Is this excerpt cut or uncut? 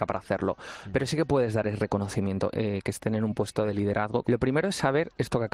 cut